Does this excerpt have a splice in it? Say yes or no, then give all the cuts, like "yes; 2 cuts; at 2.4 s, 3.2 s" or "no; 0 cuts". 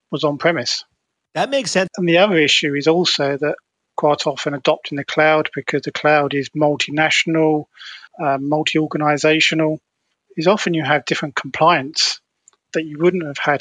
yes; 2 cuts; at 1.9 s, 8.1 s